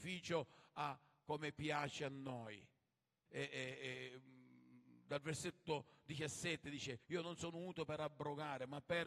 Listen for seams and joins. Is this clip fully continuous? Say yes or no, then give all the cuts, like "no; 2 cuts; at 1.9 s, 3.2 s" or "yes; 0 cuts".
no; 2 cuts; at 3.3 s, 7.0 s